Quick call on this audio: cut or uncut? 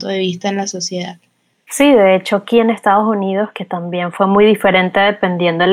cut